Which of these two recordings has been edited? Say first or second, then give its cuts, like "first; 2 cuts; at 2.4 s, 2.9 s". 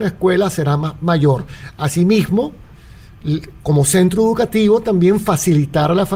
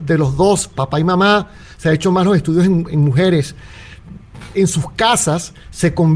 second; 2 cuts; at 2.9 s, 4.5 s